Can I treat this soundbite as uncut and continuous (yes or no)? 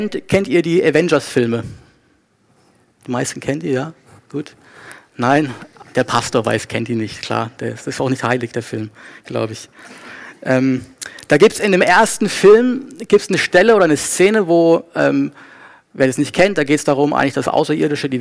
yes